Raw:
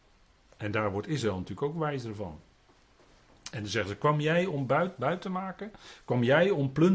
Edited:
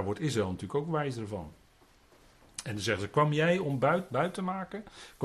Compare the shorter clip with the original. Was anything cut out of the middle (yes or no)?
no